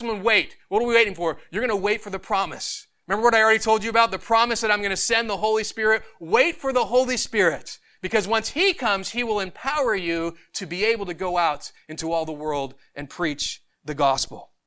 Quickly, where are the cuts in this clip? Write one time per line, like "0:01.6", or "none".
none